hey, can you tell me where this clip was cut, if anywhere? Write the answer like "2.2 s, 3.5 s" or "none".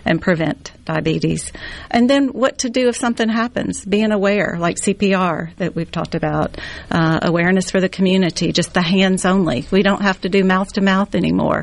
1.9 s